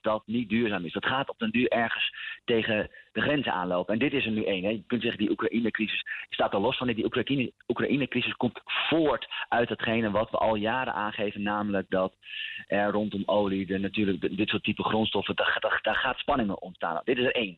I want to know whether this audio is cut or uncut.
uncut